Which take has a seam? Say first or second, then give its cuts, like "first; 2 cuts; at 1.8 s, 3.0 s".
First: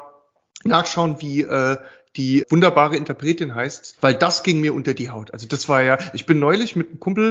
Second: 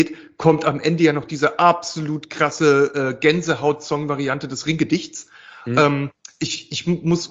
first; 2 cuts; at 2.4 s, 4.0 s